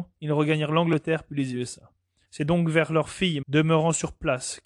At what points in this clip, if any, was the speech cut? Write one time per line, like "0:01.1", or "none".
0:02.3
0:03.4